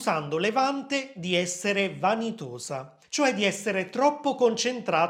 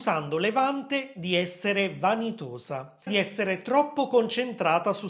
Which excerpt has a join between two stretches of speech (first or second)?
second